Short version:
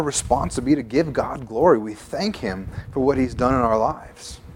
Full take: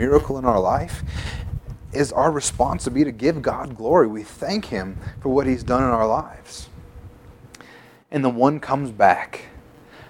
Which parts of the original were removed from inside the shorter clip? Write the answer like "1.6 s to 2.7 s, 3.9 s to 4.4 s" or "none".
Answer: none